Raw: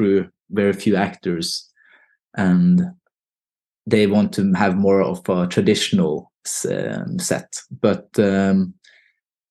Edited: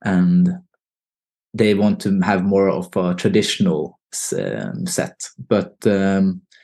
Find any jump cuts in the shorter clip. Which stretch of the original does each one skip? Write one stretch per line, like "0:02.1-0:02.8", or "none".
none